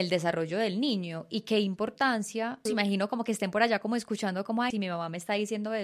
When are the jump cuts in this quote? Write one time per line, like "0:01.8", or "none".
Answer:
0:02.7
0:04.7